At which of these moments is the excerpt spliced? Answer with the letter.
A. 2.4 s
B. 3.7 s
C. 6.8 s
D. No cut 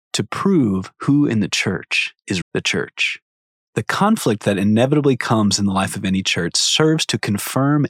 A